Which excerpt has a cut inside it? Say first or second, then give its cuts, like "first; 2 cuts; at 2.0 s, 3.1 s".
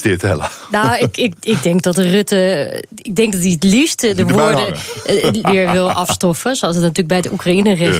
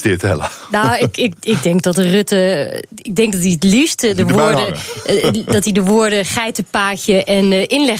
first; 1 cut; at 5.4 s